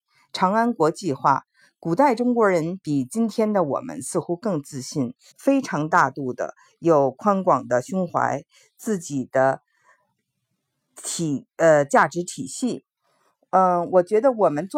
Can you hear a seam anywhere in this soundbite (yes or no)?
yes